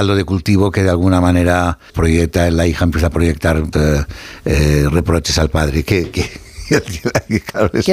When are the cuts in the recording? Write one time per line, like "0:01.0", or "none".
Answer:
0:01.9
0:03.7